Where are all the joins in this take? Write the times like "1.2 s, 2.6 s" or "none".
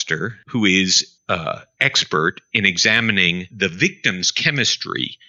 none